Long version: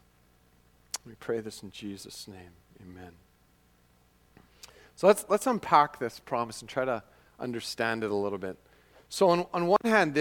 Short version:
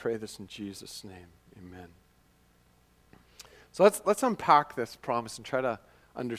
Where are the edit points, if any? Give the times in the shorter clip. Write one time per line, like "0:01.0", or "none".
none